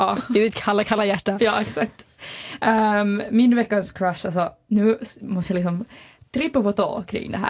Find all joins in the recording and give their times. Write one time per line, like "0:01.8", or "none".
none